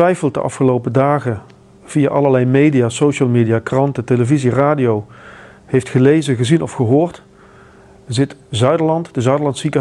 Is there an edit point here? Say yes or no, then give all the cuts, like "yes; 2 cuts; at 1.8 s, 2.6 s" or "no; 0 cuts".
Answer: no; 0 cuts